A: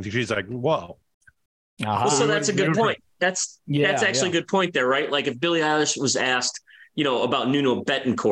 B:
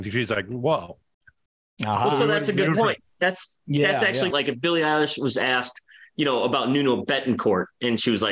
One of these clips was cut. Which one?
B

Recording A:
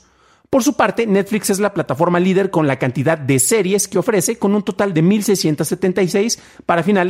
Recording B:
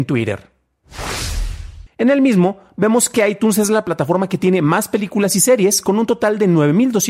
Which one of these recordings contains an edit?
B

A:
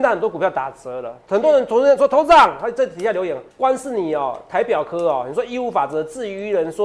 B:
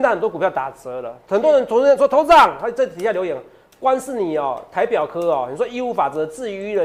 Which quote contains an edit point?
A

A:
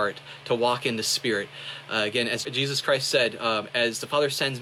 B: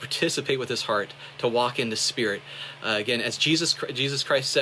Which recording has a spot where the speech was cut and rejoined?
A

